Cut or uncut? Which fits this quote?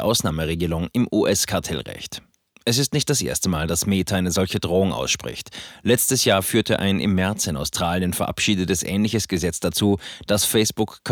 uncut